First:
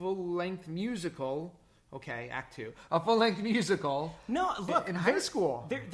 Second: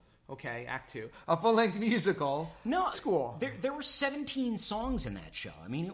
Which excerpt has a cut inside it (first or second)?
second